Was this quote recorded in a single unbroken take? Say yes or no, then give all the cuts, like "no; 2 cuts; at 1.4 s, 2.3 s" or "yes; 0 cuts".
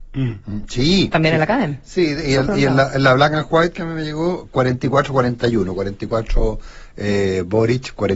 yes; 0 cuts